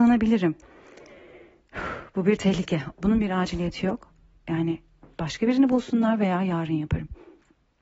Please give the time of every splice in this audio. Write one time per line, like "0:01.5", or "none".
0:02.9